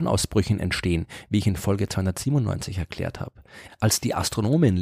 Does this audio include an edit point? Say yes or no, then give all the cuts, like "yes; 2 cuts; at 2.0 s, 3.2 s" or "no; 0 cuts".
yes; 1 cut; at 3.7 s